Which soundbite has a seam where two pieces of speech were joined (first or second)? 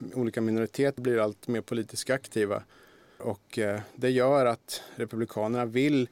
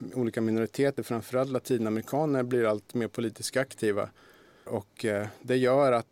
first